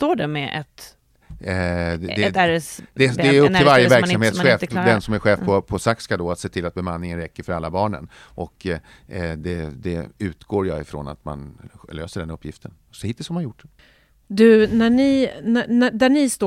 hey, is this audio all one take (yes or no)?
yes